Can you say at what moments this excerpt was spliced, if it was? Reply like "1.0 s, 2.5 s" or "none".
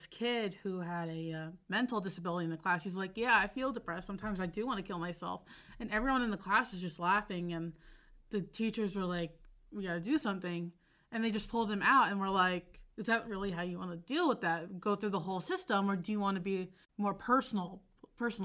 none